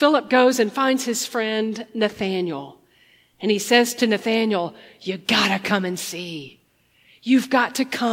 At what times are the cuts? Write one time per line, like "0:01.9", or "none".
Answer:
none